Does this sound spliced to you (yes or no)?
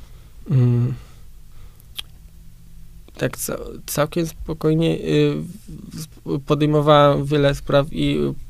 no